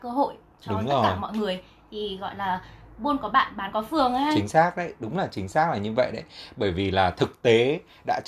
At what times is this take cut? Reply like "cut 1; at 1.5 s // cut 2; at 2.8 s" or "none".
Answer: none

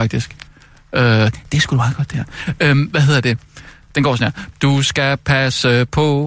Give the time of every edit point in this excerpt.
cut 1; at 4.5 s

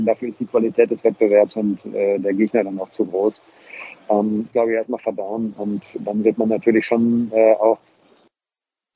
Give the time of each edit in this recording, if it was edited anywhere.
cut 1; at 4.5 s

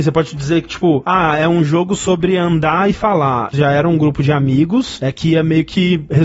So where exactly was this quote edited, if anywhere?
cut 1; at 3.5 s

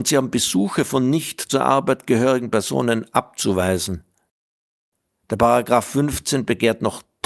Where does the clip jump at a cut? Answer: none

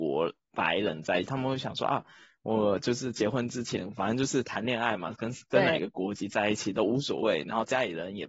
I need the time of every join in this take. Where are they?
none

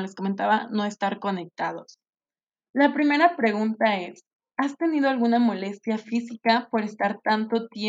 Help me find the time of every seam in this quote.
cut 1; at 2.6 s

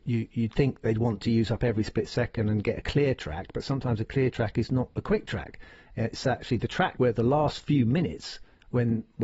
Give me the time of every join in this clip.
cut 1; at 7.0 s

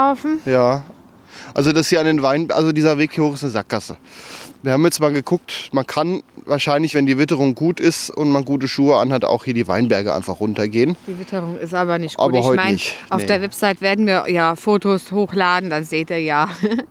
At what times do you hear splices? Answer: none

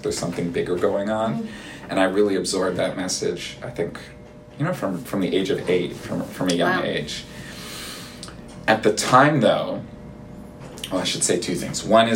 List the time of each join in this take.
none

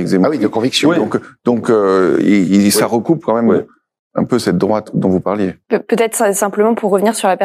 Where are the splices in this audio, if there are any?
cut 1; at 5.6 s

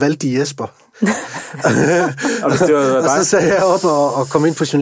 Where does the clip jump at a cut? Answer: none

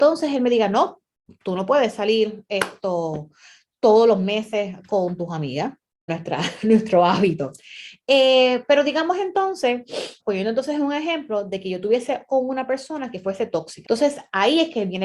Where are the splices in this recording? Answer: cut 1; at 6.1 s // cut 2; at 10.2 s // cut 3; at 13.8 s

